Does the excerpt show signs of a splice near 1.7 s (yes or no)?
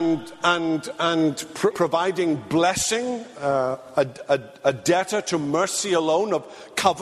yes